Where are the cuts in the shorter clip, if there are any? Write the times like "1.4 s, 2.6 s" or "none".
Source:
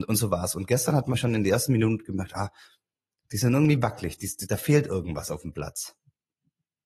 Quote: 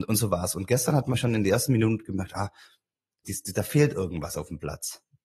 3.2 s